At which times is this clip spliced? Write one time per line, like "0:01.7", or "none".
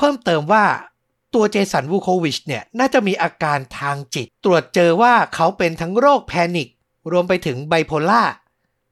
0:04.3